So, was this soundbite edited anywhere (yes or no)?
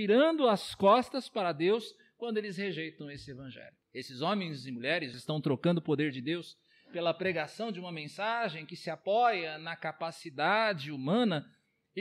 yes